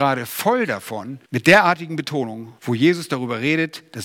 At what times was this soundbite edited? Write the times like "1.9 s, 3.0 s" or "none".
1.2 s, 2.6 s